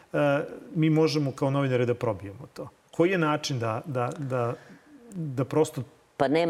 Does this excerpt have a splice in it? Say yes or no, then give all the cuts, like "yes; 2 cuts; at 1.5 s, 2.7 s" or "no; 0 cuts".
no; 0 cuts